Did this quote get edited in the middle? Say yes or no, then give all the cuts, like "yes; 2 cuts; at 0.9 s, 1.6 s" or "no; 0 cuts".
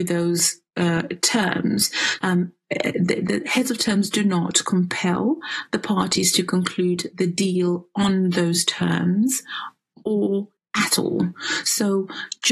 yes; 2 cuts; at 2.2 s, 10.6 s